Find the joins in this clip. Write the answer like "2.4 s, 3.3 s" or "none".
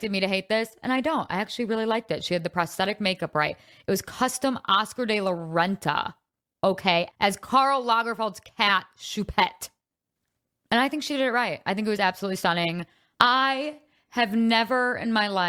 7.1 s, 13.1 s